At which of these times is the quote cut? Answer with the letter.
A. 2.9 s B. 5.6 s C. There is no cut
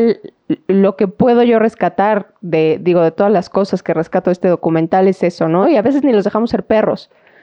B